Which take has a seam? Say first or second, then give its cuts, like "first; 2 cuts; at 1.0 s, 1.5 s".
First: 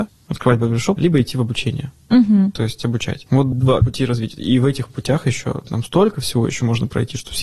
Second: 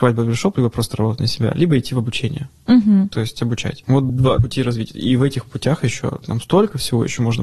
first; 1 cut; at 1.0 s